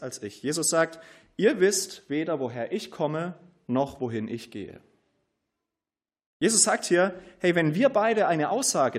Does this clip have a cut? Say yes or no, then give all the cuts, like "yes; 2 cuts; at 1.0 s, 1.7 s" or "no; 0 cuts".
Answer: no; 0 cuts